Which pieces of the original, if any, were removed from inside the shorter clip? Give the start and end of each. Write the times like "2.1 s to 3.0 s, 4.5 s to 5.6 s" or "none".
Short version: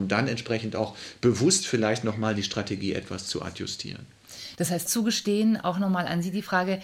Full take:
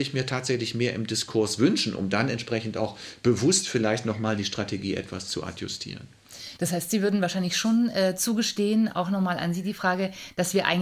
6.9 s to 8.2 s